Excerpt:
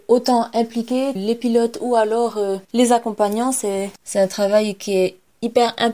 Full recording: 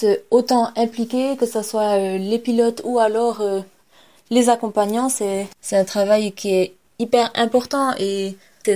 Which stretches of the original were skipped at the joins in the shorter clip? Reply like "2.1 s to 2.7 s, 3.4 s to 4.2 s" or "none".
1.4 s to 2.2 s, 3.7 s to 4.2 s